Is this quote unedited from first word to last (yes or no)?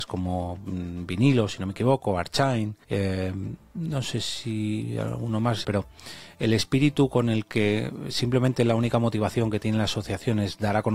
no